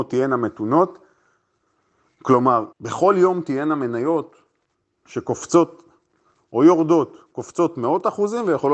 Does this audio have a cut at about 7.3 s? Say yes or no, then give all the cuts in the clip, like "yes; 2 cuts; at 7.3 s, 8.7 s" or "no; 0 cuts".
no; 1 cut; at 2.7 s